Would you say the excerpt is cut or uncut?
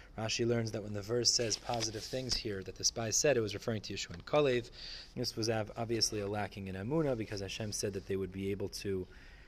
cut